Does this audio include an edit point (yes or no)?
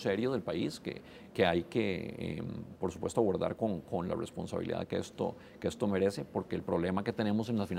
no